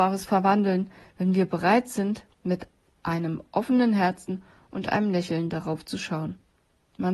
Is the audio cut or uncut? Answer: uncut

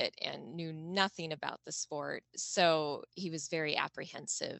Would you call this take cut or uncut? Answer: uncut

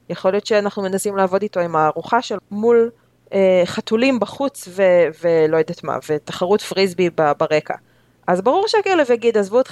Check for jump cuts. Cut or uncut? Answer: cut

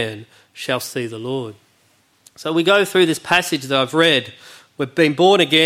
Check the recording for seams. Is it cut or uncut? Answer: uncut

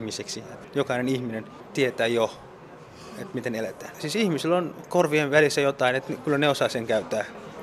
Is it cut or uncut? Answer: cut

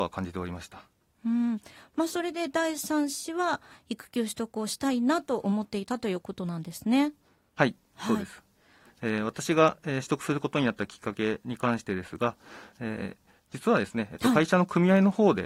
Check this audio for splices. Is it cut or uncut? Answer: cut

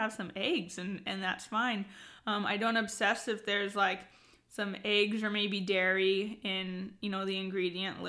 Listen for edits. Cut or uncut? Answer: uncut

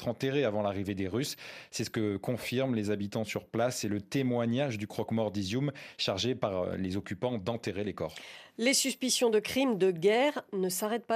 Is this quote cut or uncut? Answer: uncut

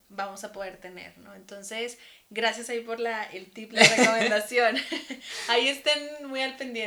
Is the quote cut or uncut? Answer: uncut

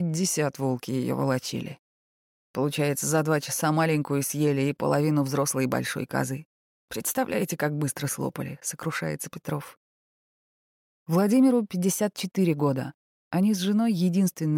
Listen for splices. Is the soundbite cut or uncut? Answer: uncut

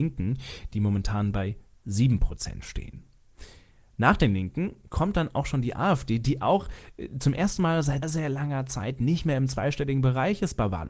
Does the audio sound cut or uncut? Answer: cut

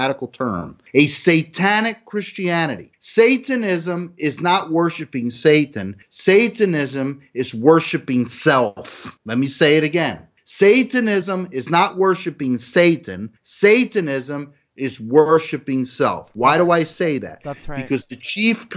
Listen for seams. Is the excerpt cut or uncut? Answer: uncut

